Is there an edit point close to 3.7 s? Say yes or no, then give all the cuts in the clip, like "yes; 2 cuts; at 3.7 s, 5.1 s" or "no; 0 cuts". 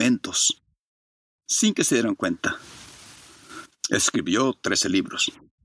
yes; 1 cut; at 3.7 s